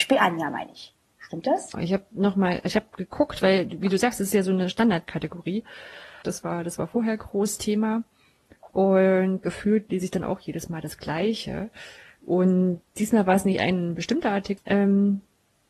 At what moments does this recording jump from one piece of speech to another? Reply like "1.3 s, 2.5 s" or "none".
1.7 s, 6.2 s, 14.6 s